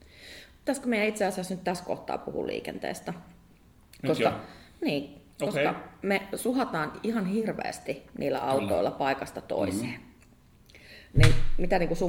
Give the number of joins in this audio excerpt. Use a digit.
0